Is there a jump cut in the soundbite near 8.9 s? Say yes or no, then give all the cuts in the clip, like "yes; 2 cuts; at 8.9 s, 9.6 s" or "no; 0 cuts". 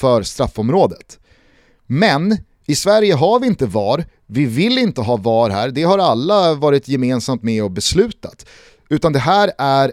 yes; 1 cut; at 8.9 s